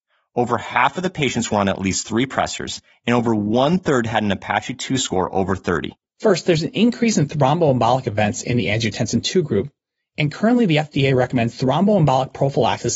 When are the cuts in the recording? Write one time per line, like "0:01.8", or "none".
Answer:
0:06.1